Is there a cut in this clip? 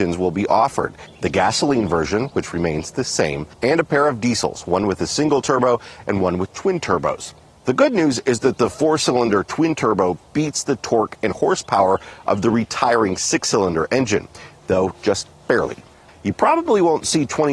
yes; 1 cut; at 16.1 s

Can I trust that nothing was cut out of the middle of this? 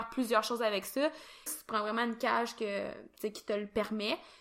no; 1 cut; at 1.5 s

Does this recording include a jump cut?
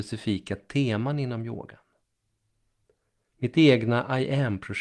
yes; 1 cut; at 3.3 s

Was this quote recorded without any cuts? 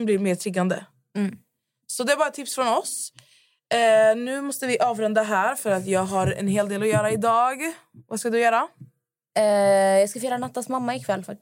yes; 0 cuts

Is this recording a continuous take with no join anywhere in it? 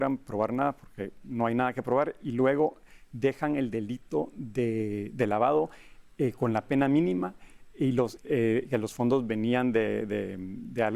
no; 1 cut; at 8.2 s

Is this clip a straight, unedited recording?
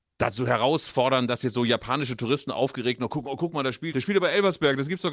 no; 1 cut; at 3.9 s

